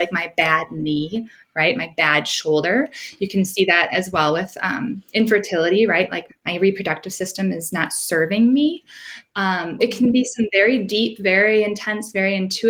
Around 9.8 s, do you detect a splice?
yes; 2 cuts; at 6.3 s, 9.8 s

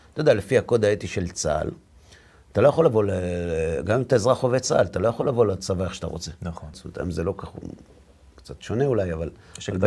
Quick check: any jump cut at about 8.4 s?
no; 1 cut; at 6.7 s

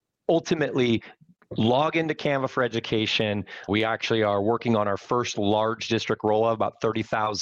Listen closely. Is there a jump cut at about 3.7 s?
yes; 1 cut; at 3.7 s

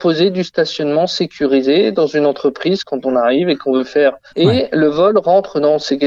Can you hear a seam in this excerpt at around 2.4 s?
no; 1 cut; at 4.3 s

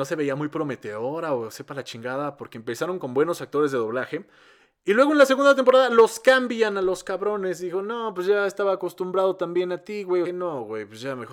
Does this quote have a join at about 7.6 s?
no; 1 cut; at 10.2 s

